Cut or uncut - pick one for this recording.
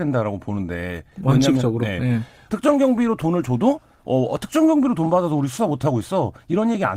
cut